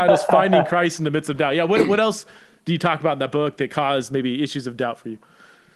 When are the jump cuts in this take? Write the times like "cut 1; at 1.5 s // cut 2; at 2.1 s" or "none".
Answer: none